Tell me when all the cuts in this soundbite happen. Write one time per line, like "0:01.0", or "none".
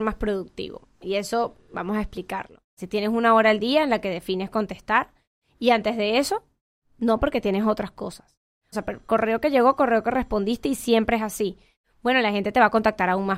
0:02.8
0:08.7

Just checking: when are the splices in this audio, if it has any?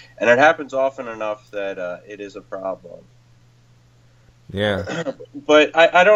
none

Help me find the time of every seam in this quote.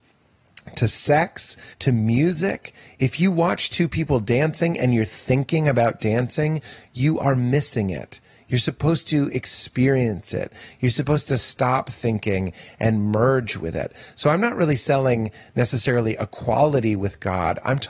0:01.7

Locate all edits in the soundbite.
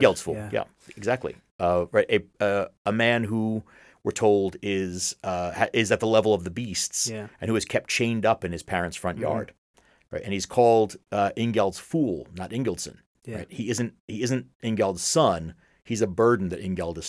none

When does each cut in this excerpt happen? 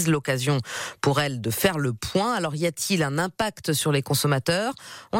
none

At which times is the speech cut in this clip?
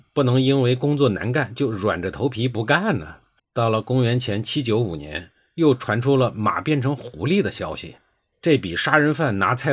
0:03.4
0:08.3

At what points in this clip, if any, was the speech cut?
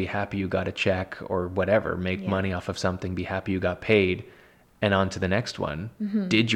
none

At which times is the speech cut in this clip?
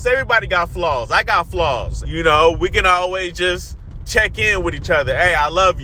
0:02.0

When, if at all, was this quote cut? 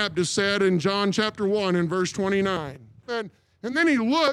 0:03.1

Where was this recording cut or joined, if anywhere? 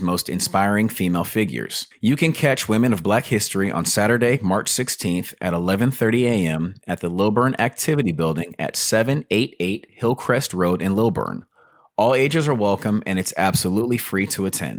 none

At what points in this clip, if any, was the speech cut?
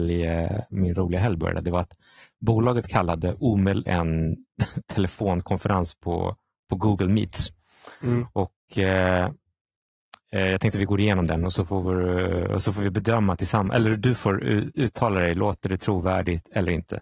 0:03.9

